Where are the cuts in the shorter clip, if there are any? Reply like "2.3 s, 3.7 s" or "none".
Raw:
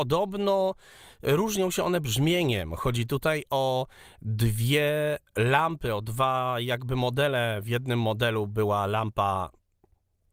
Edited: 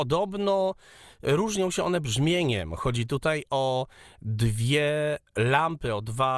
none